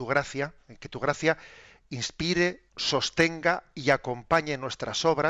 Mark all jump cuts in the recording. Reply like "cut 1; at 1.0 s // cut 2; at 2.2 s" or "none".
cut 1; at 2.7 s